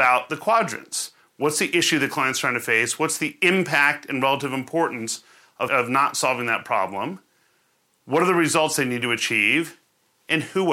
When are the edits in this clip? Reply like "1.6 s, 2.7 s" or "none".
5.7 s